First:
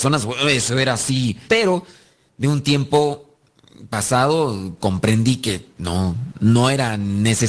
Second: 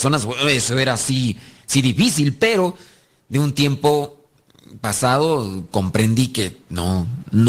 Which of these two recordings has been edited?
first; 1 cut; at 1.5 s

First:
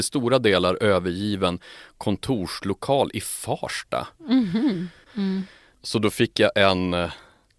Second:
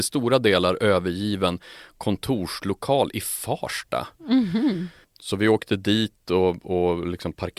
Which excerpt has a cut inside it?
first; 1 cut; at 5.1 s

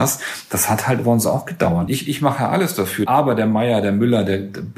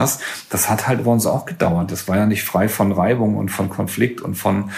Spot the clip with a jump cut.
first; 1 cut; at 1.9 s

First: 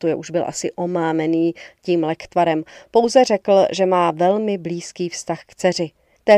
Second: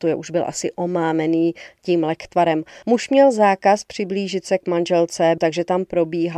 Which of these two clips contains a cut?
second; 2 cuts; at 2.8 s, 5.4 s

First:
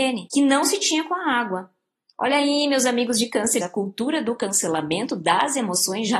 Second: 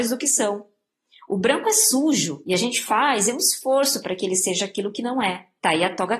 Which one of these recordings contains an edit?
first; 1 cut; at 3.6 s

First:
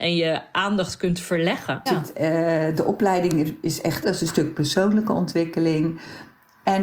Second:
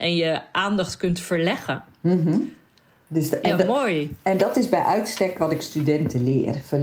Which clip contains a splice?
first; 2 cuts; at 1.9 s, 4.0 s

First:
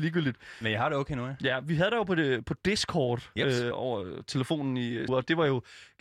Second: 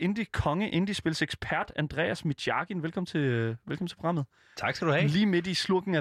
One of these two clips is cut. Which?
first; 2 cuts; at 3.7 s, 5.1 s

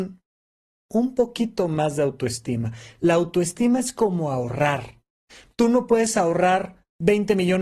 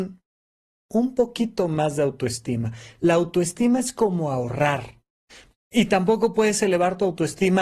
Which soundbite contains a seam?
second; 1 cut; at 5.5 s

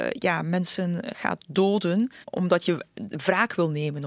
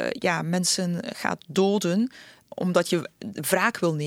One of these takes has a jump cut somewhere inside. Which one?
first; 1 cut; at 2.2 s

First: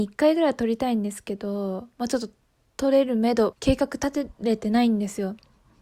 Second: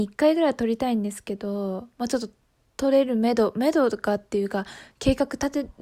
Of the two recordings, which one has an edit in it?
first; 1 cut; at 3.5 s

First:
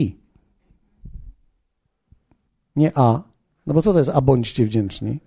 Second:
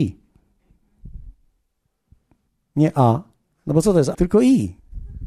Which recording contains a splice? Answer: second; 1 cut; at 4.1 s

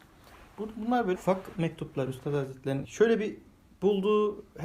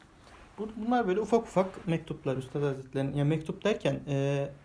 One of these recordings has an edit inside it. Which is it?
first; 2 cuts; at 1.1 s, 2.8 s

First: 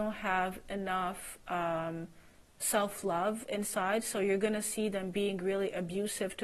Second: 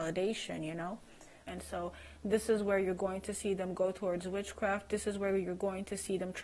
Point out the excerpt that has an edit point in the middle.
second; 1 cut; at 1.5 s

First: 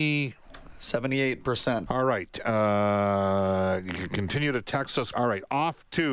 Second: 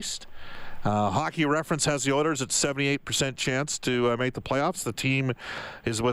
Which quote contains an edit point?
first; 2 cuts; at 1.9 s, 5.1 s

